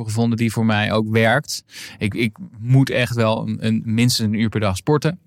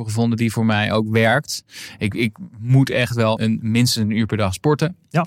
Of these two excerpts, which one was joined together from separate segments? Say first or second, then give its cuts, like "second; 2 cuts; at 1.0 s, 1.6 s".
second; 1 cut; at 3.4 s